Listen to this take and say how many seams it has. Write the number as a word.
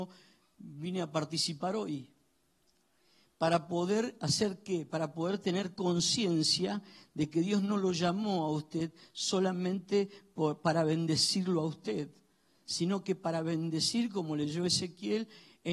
zero